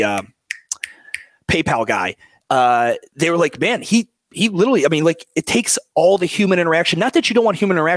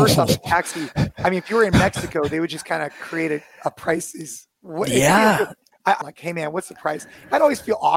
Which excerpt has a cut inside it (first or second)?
second